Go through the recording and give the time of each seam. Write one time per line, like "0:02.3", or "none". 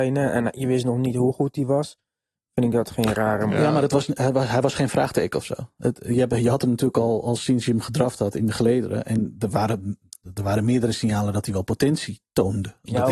none